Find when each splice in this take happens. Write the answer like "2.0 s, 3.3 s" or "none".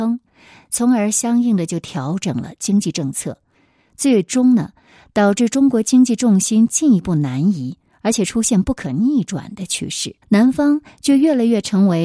10.2 s